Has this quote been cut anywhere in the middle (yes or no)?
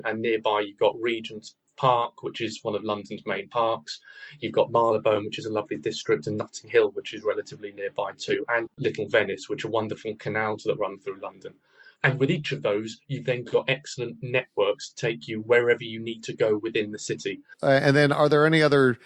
yes